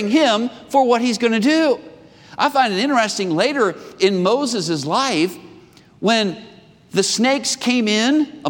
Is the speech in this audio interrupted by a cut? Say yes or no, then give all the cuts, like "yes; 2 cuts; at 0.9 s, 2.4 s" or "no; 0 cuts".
no; 0 cuts